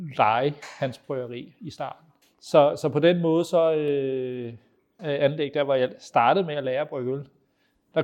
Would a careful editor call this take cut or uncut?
cut